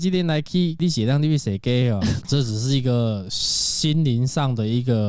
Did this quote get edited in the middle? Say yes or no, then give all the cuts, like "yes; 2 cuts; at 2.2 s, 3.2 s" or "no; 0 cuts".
yes; 1 cut; at 2.2 s